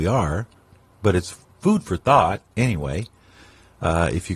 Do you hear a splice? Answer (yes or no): no